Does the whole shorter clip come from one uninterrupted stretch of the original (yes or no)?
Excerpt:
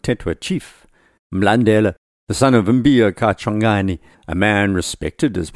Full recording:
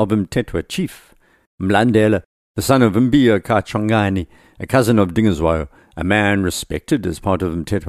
no